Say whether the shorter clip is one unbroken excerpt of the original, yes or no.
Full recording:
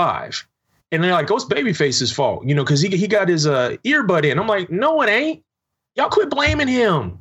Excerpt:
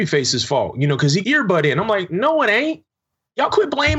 no